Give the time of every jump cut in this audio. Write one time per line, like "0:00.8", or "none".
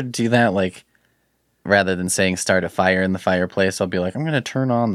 0:01.7